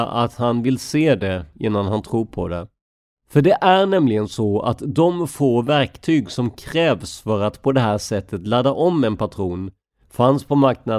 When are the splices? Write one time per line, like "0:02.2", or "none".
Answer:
0:03.2

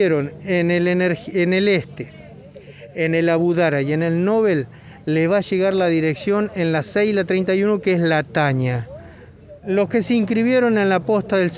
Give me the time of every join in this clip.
0:09.6

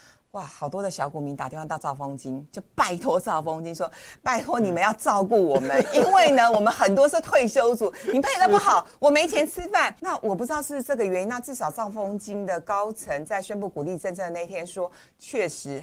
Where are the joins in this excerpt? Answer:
none

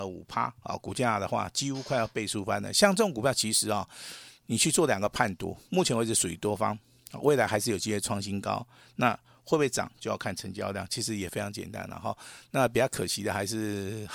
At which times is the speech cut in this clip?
none

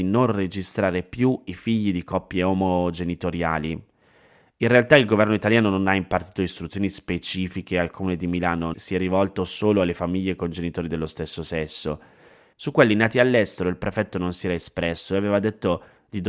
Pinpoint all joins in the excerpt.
0:08.7
0:12.5

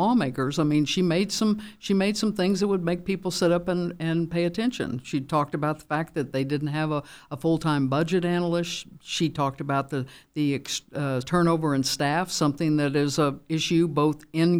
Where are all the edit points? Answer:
0:11.2

